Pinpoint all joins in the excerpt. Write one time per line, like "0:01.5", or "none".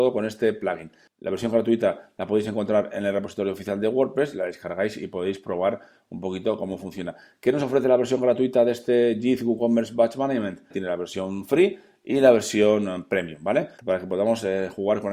0:10.7
0:13.8